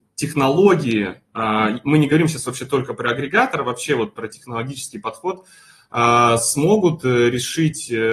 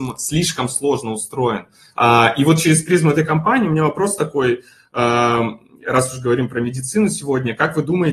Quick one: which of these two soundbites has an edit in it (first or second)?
second